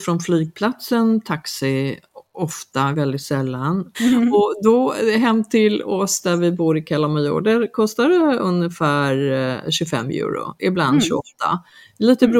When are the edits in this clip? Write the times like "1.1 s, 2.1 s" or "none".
2.9 s, 3.9 s